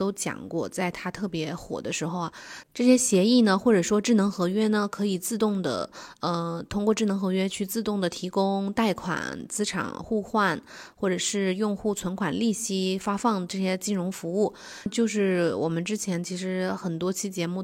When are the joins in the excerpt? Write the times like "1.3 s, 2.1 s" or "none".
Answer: 2.6 s, 14.9 s